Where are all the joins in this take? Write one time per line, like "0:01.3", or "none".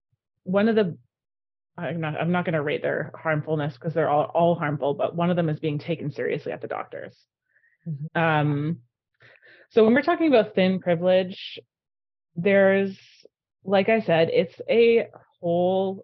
0:08.1